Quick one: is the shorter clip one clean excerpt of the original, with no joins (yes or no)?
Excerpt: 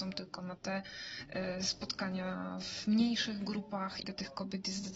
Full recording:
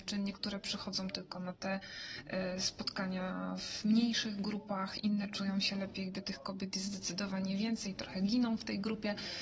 no